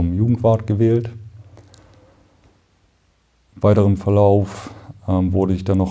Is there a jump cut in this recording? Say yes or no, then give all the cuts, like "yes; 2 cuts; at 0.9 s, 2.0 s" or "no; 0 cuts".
no; 0 cuts